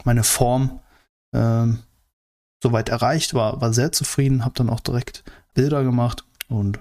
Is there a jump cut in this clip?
yes; 1 cut; at 5.5 s

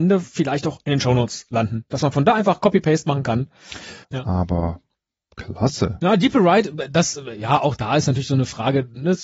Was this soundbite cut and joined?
yes; 1 cut; at 4.0 s

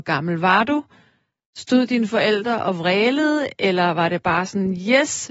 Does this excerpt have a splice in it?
no; 0 cuts

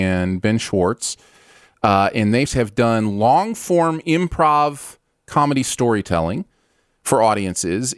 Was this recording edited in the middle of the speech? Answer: yes; 1 cut; at 2.5 s

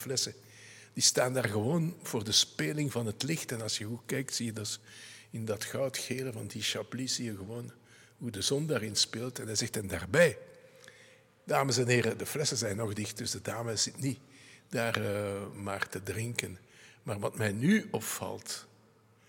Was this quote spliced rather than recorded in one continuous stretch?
no; 0 cuts

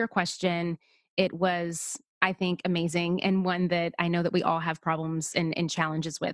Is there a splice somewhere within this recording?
no; 0 cuts

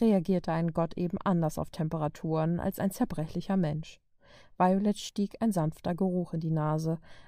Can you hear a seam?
no; 0 cuts

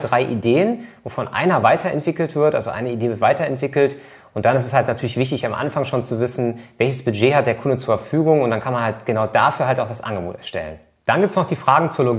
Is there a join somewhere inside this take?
no; 0 cuts

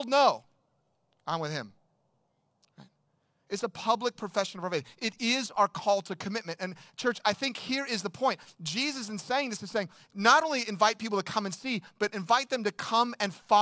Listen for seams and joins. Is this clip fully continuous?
yes; 0 cuts

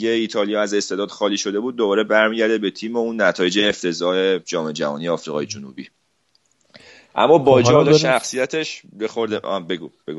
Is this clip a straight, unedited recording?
yes; 0 cuts

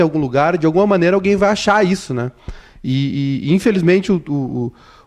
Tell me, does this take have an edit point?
no; 0 cuts

